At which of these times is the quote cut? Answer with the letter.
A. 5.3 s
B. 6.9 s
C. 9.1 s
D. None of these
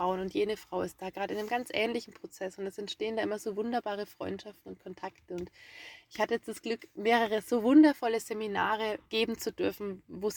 C